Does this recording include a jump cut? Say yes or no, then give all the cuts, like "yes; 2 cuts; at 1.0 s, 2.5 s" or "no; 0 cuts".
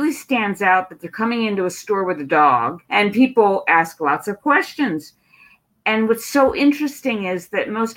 yes; 1 cut; at 2.8 s